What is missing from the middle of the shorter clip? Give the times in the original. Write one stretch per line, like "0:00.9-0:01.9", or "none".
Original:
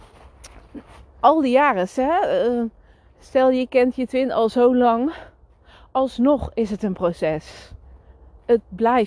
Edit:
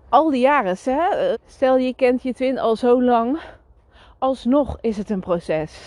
0:02.4-0:03.1